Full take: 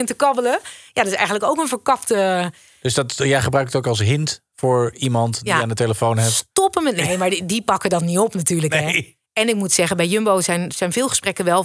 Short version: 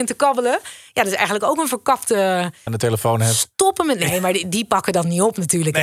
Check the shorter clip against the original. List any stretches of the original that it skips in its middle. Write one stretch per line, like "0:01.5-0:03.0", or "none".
0:02.7-0:05.6